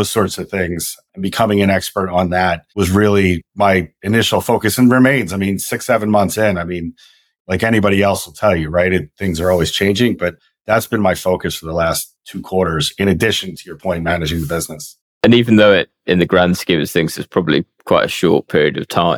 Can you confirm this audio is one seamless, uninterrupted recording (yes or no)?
no